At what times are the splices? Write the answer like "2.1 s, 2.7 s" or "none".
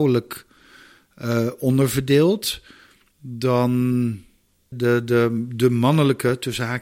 4.7 s